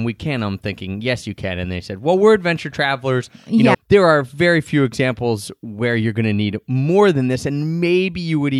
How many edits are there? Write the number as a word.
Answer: one